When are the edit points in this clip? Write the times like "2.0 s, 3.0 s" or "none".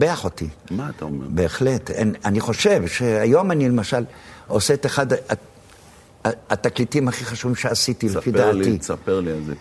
none